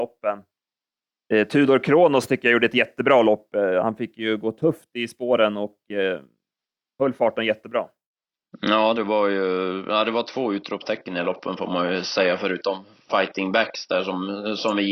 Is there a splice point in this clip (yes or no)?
no